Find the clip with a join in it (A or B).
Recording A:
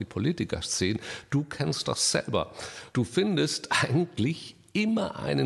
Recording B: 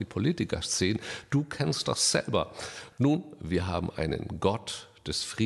B